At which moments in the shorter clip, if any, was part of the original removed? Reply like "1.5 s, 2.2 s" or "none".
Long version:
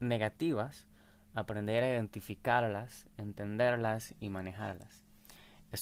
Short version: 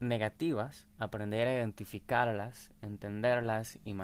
0.9 s